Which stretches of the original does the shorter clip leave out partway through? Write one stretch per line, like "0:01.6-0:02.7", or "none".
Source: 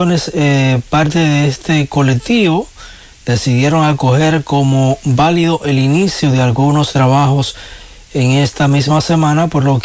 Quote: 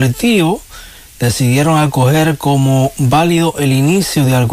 none

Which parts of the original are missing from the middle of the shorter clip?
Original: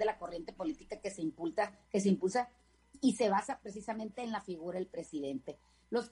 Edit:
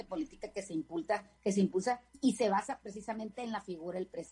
0:02.6-0:02.9

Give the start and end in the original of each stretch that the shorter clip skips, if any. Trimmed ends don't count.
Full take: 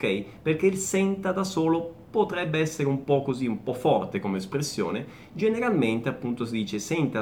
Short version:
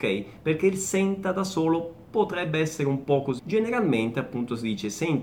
0:03.4-0:05.3

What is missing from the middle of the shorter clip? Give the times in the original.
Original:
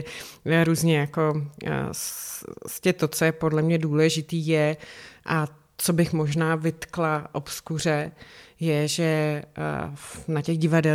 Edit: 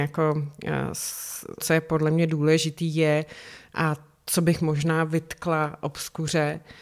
0:02.6-0:03.1

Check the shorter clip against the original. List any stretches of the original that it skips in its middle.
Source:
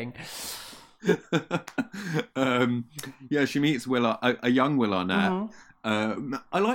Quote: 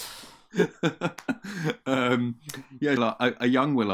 0:03.5-0:04.0

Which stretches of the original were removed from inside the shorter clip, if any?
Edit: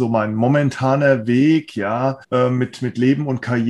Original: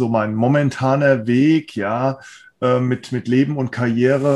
0:02.2-0:02.5

